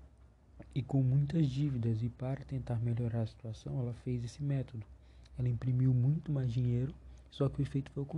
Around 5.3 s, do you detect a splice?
no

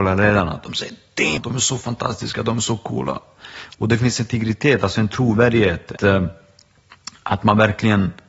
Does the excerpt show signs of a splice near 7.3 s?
no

